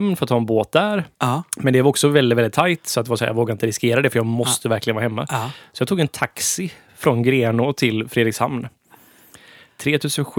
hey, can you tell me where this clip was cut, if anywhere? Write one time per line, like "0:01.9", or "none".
0:01.1